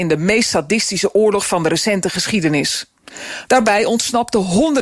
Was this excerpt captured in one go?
no; 1 cut; at 3.5 s

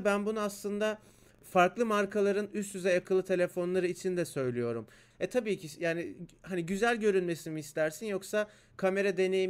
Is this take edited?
yes; 2 cuts; at 1.4 s, 5.1 s

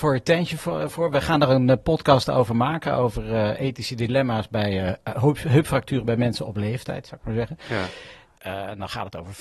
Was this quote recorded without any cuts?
no; 1 cut; at 8.4 s

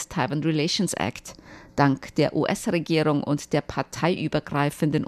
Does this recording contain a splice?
no; 0 cuts

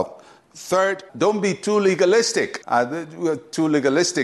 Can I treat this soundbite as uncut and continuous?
no; 2 cuts; at 1.1 s, 2.6 s

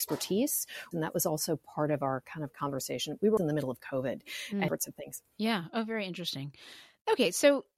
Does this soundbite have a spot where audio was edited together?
yes; 3 cuts; at 0.9 s, 3.4 s, 4.7 s

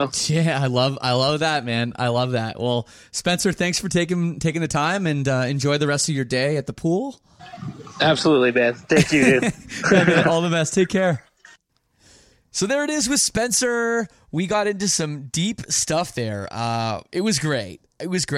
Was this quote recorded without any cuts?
yes; 0 cuts

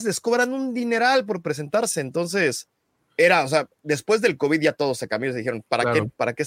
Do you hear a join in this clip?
no; 0 cuts

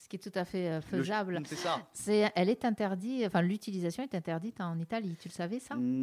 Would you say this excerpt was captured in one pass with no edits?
yes; 0 cuts

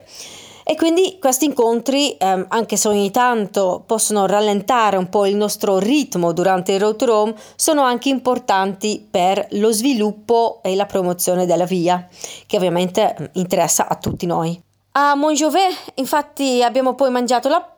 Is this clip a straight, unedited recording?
yes; 0 cuts

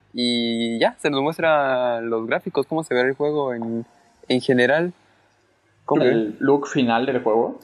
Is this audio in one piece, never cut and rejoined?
no; 1 cut; at 6.0 s

